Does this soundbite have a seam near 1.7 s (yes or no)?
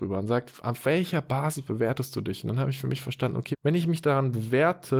no